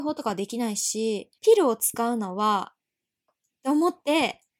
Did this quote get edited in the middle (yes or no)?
yes